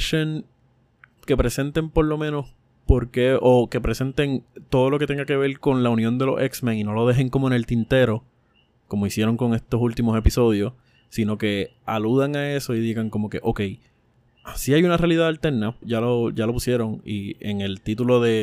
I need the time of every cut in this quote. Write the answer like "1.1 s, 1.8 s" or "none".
1.2 s, 15.8 s